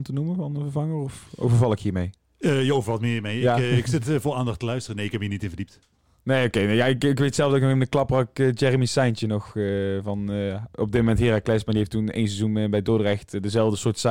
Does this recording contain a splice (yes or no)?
no